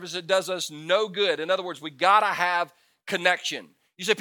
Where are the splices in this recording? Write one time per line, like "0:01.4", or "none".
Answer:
none